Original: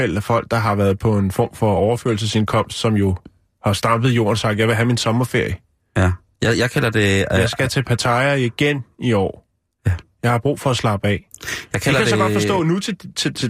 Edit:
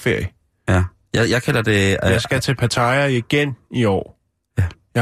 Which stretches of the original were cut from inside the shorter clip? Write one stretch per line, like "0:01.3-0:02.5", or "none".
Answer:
none